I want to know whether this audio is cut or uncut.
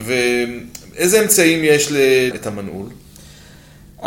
cut